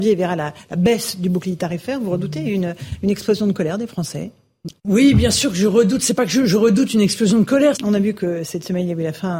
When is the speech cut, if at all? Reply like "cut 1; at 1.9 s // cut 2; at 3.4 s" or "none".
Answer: cut 1; at 4.8 s // cut 2; at 7.7 s